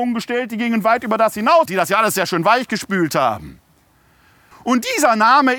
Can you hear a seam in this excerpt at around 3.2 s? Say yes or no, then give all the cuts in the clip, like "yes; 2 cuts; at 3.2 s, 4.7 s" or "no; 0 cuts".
no; 2 cuts; at 1.7 s, 4.5 s